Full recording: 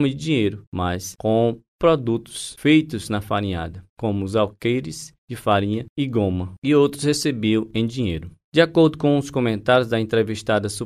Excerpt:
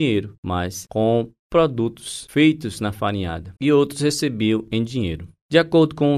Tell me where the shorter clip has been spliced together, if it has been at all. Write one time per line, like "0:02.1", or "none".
0:03.6